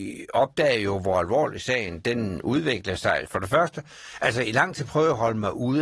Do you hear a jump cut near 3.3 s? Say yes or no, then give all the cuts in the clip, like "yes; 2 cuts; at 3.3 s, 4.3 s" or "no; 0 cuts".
yes; 1 cut; at 3.3 s